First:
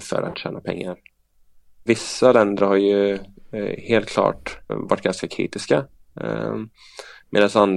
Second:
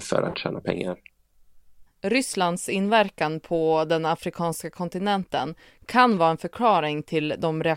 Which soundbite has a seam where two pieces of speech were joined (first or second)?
first